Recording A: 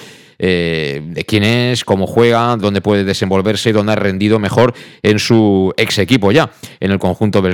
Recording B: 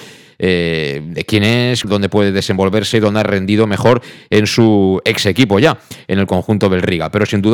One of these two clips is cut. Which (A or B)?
B